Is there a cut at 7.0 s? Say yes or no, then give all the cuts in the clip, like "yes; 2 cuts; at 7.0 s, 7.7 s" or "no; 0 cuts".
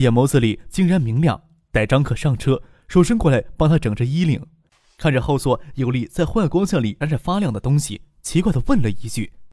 yes; 1 cut; at 7.0 s